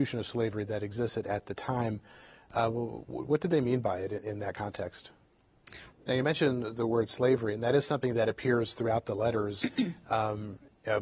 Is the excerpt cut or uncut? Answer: cut